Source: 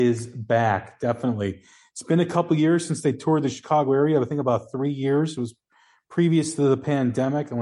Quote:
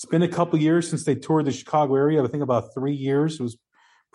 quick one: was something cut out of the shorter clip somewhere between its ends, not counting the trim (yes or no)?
no